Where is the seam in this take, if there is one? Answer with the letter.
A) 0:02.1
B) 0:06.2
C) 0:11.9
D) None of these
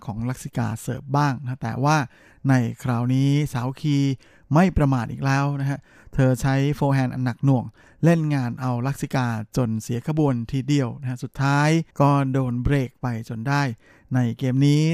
C